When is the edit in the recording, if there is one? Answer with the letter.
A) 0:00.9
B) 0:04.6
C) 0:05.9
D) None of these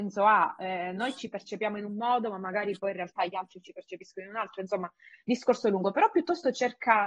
D